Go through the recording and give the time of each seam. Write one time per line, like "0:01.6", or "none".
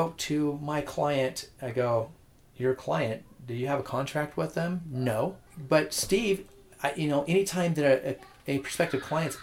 0:05.5